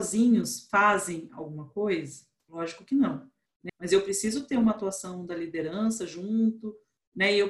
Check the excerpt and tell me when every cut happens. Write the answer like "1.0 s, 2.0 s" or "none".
3.7 s

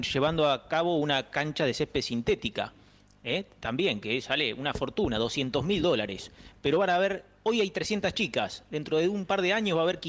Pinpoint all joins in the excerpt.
none

